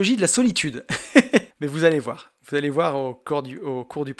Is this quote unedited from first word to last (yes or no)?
no